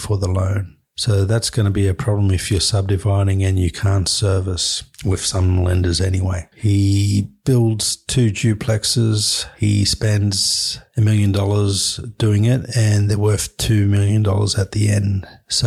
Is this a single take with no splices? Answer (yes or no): no